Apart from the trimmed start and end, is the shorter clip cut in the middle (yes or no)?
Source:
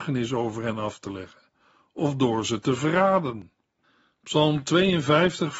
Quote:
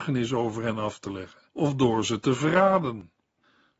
yes